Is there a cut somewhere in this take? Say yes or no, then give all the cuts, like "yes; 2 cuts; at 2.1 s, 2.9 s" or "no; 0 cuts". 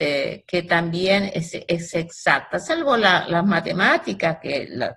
no; 0 cuts